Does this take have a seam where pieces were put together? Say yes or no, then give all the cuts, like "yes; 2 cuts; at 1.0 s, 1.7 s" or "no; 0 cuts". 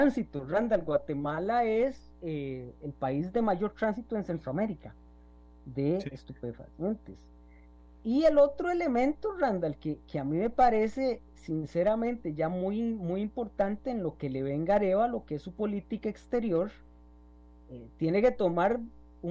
no; 0 cuts